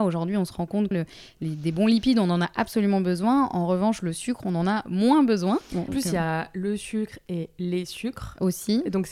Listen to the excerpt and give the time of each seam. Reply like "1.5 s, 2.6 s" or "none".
0.9 s, 5.9 s